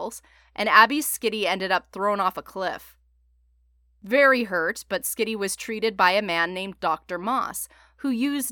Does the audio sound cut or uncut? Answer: uncut